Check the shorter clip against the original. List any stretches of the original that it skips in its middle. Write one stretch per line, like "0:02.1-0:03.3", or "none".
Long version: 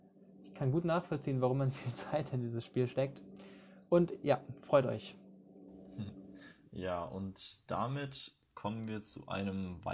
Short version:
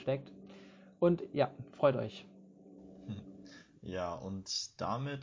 none

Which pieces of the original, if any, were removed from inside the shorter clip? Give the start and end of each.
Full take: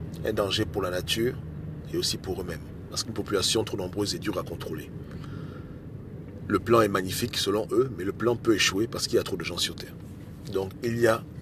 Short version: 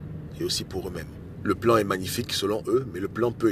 0:02.9-0:06.4

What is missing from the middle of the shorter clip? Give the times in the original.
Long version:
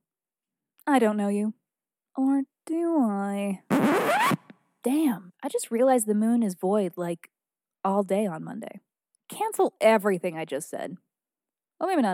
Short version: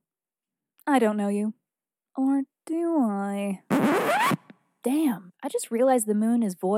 none

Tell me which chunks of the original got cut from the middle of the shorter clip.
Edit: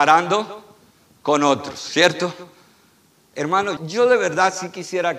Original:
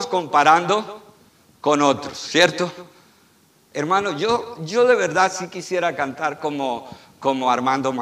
0:04.2-0:04.6

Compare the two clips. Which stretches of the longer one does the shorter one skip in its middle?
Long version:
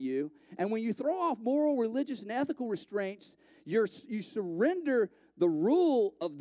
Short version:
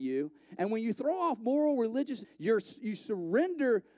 0:02.2-0:03.5

